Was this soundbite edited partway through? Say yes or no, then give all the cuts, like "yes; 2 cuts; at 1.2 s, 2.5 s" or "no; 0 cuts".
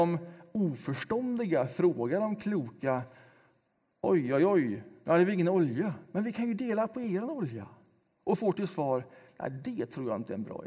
no; 0 cuts